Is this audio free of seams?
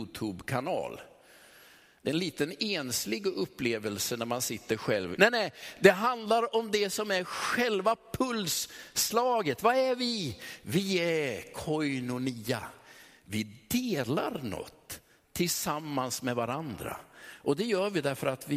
no; 1 cut; at 5.2 s

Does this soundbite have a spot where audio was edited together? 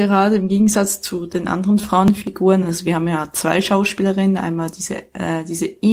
no; 0 cuts

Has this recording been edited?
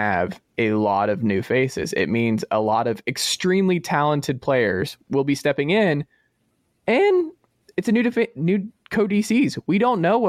no; 0 cuts

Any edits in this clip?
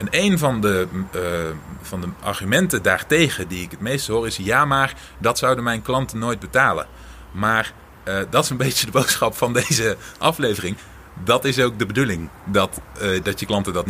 no; 0 cuts

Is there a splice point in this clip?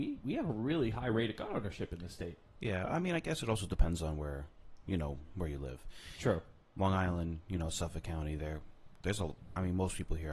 no; 0 cuts

